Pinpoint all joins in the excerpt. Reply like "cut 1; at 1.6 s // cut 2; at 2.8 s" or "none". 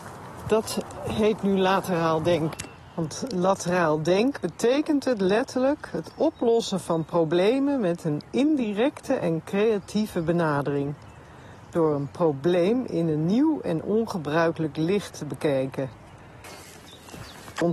cut 1; at 4.4 s